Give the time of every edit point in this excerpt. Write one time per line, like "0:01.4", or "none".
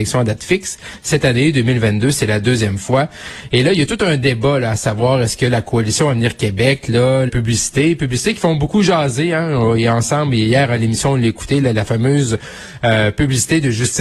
0:07.3